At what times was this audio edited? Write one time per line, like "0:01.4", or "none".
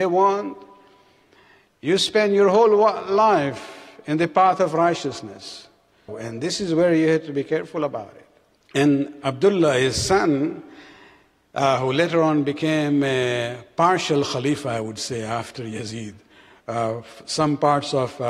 0:06.1
0:08.5